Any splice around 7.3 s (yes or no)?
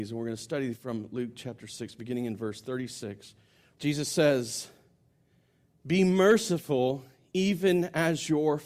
no